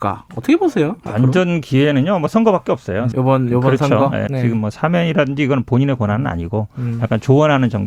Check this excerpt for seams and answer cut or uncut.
cut